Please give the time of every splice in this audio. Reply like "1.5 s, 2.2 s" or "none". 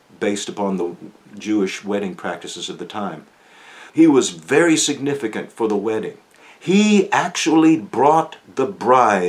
3.9 s